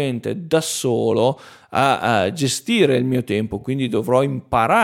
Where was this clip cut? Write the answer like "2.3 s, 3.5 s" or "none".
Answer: none